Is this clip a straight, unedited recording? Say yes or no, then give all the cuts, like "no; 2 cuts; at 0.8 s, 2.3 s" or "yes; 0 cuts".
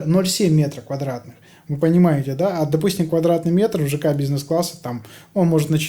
yes; 0 cuts